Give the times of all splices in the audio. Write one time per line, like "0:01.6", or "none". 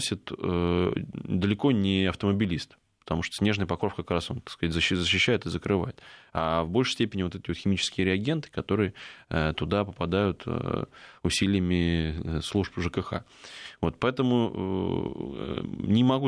none